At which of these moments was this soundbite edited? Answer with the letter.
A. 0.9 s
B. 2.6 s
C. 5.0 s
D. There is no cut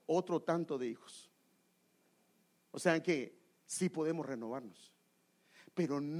B